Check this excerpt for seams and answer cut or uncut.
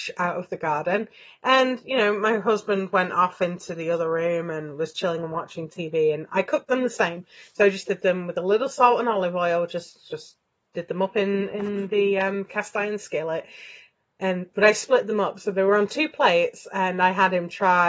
uncut